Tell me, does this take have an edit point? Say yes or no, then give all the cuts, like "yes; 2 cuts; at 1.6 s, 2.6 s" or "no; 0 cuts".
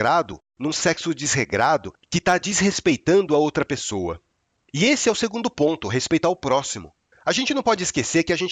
yes; 1 cut; at 7.1 s